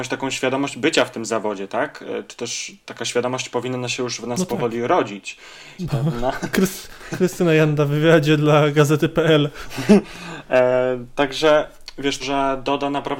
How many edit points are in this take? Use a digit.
2